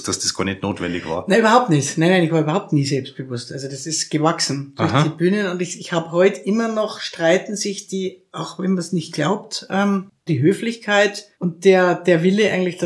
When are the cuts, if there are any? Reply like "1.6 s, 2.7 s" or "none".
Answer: 10.3 s, 11.3 s